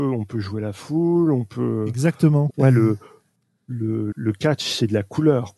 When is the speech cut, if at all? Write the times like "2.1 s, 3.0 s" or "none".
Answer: 2.5 s, 4.1 s